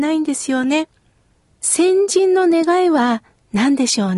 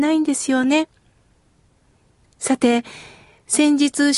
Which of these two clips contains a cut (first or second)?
first